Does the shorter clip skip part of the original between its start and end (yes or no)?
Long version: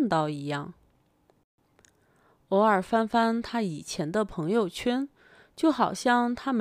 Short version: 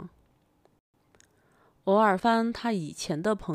yes